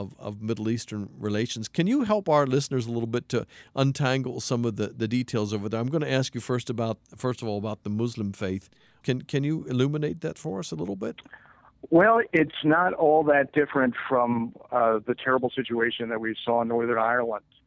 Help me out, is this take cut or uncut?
cut